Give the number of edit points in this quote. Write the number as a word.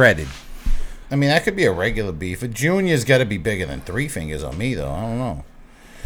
one